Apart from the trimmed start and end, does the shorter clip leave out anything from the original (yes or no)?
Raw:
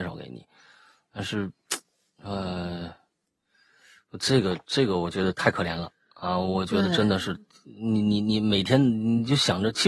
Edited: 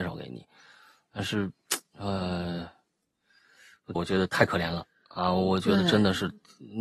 yes